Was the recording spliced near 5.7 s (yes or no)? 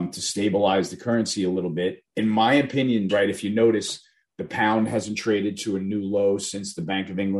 no